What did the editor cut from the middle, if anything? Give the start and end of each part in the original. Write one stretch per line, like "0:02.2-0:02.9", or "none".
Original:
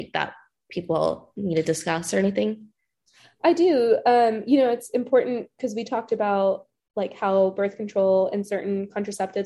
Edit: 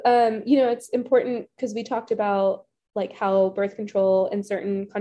none